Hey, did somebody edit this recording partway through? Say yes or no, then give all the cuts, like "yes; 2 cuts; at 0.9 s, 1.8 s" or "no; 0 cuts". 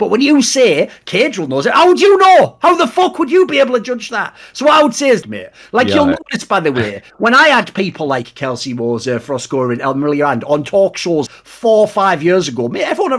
yes; 2 cuts; at 5.2 s, 11.3 s